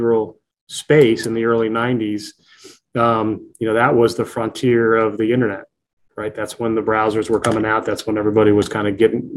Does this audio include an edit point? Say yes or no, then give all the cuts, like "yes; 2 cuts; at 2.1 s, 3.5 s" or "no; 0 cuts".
no; 0 cuts